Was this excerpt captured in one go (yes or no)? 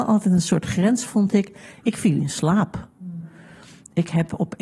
yes